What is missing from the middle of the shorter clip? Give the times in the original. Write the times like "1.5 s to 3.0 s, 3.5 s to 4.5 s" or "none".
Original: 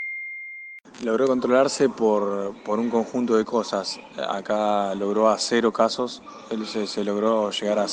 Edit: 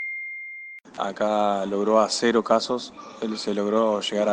1.0 s to 4.3 s, 6.7 s to 6.9 s